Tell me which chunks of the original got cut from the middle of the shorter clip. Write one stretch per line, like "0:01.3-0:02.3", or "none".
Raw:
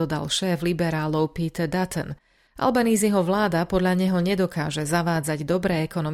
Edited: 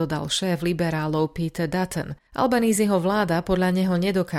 0:02.3-0:02.5